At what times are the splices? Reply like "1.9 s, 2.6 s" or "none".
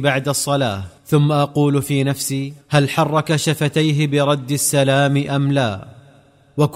1.0 s, 2.6 s